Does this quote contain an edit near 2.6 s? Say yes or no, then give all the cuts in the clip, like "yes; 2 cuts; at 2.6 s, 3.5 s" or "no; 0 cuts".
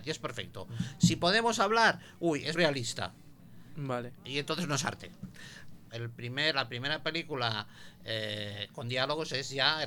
yes; 2 cuts; at 2.6 s, 5.9 s